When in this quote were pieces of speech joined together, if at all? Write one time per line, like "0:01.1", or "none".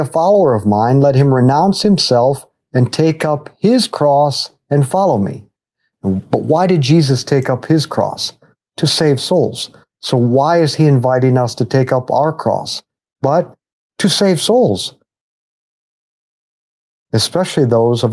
none